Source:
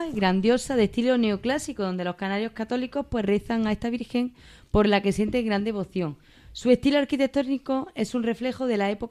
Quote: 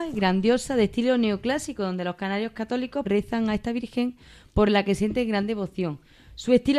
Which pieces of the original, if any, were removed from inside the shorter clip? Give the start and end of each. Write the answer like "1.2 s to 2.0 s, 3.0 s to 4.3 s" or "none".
3.0 s to 3.2 s